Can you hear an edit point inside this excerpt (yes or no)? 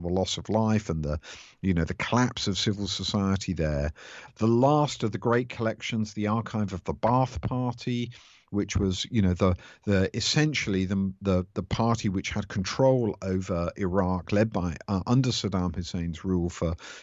yes